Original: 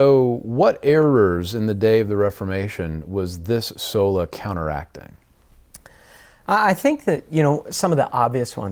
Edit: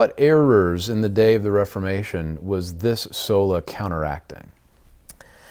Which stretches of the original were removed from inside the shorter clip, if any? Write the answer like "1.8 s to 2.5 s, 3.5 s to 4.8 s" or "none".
none